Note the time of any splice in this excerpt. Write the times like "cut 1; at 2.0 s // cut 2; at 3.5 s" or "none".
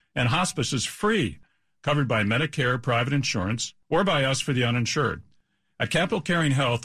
none